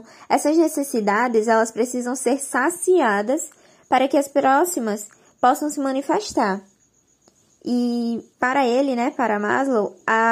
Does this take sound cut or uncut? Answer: cut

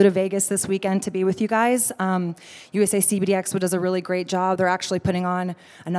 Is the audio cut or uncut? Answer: uncut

